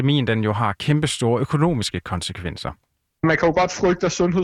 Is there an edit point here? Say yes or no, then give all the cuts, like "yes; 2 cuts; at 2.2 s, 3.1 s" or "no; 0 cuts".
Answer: no; 0 cuts